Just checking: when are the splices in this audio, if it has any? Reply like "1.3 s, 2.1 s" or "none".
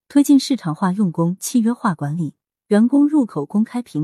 2.5 s